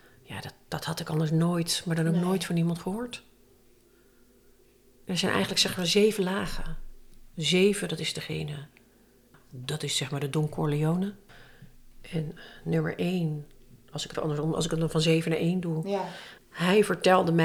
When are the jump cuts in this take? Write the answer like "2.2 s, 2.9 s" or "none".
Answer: 14.1 s, 16.4 s